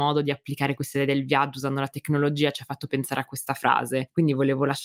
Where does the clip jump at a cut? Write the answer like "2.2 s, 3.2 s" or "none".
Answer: 2.9 s

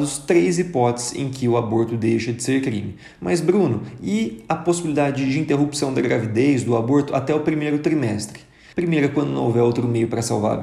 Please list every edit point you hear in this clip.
3.2 s, 8.7 s

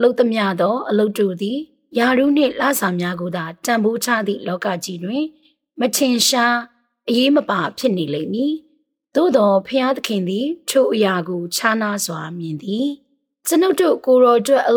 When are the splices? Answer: none

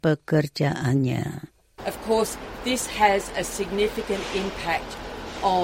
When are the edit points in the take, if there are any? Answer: 1.8 s

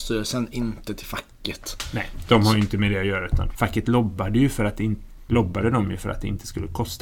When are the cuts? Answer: 3.5 s, 5.3 s

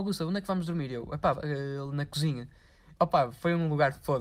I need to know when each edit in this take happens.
1.3 s, 3.0 s

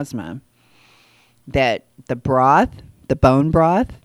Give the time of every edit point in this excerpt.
none

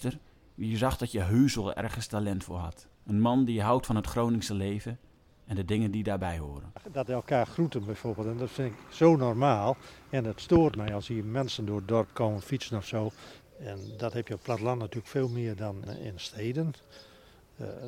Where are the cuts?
3.0 s, 13.4 s, 15.9 s

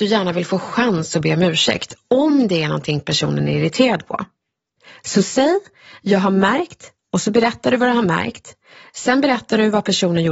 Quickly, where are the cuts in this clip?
none

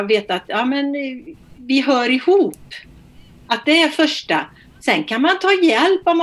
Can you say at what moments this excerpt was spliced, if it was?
1.4 s

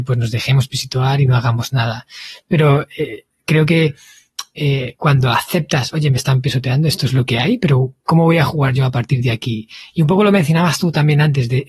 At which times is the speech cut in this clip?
none

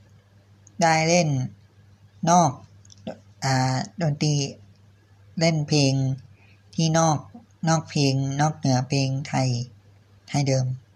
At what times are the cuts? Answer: none

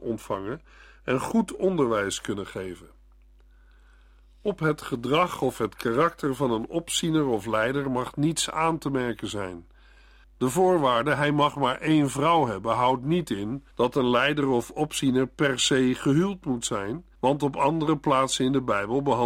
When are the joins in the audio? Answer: 10.2 s, 13.7 s, 17.2 s

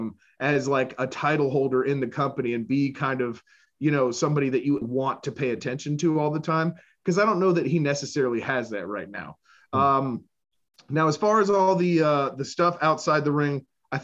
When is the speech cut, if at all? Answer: 4.8 s

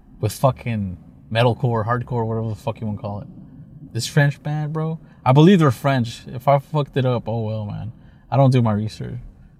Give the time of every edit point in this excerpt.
3.9 s

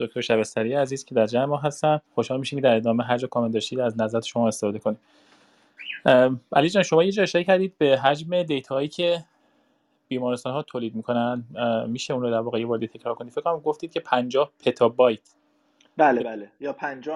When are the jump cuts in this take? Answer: 2.1 s

